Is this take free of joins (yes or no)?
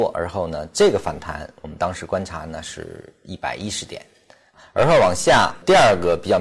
yes